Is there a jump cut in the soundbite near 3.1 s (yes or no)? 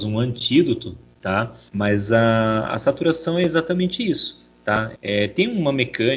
no